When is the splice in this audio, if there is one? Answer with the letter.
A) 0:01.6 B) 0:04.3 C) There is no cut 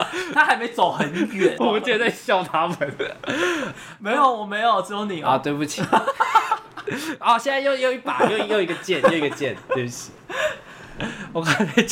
A